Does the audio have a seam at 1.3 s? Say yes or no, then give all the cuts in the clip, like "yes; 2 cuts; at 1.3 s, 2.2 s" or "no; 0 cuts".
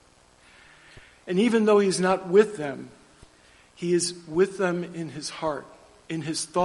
no; 0 cuts